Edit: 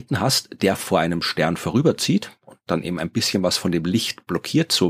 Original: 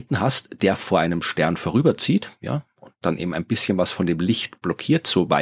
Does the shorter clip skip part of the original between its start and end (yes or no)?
yes